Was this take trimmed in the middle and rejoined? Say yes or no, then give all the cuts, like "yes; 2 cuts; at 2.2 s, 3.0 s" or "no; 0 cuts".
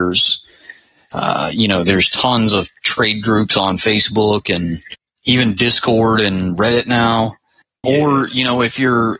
yes; 1 cut; at 7.8 s